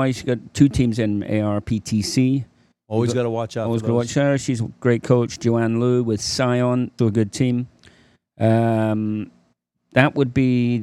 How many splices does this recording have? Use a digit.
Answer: 1